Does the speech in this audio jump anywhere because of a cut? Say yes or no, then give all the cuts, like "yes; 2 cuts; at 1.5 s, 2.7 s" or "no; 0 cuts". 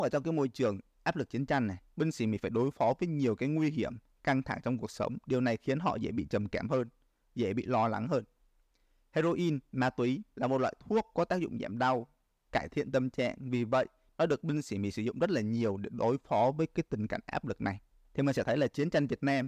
no; 0 cuts